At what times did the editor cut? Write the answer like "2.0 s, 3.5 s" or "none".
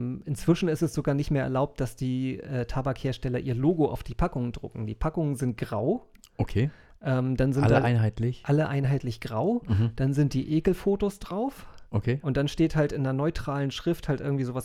none